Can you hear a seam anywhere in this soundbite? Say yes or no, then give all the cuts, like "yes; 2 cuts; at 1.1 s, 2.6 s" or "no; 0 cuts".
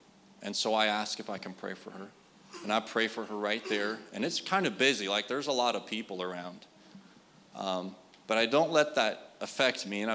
no; 0 cuts